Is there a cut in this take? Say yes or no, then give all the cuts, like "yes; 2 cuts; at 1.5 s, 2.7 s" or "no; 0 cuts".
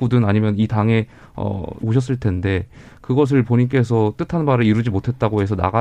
yes; 1 cut; at 1.8 s